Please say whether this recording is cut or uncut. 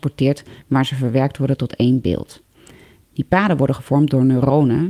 uncut